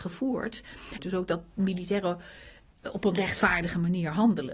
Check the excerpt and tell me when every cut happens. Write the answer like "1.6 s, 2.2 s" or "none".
1.0 s